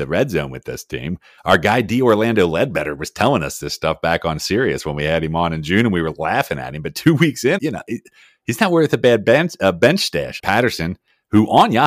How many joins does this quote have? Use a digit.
2